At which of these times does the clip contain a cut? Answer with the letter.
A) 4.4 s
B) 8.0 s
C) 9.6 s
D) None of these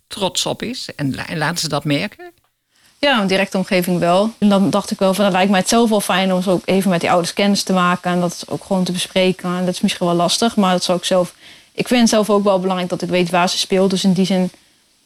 A